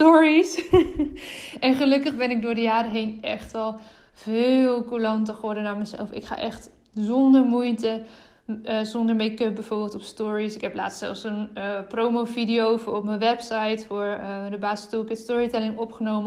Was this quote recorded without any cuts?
yes; 0 cuts

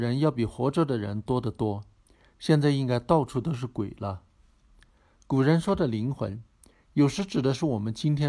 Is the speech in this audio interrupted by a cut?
no; 0 cuts

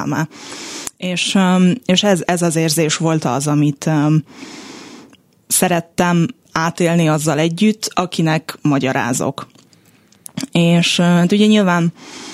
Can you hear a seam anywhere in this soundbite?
no; 0 cuts

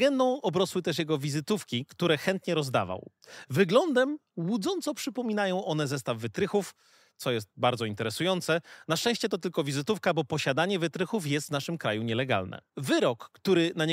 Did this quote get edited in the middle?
yes; 1 cut; at 12.7 s

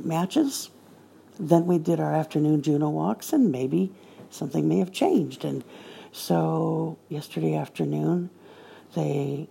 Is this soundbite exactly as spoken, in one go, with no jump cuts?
yes; 0 cuts

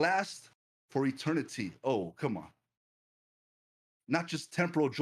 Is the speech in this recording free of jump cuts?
yes; 0 cuts

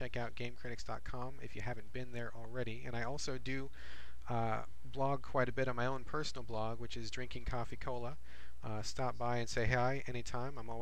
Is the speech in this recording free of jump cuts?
yes; 0 cuts

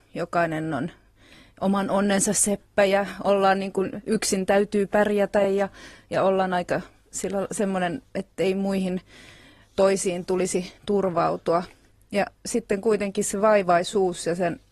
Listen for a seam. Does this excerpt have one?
no; 0 cuts

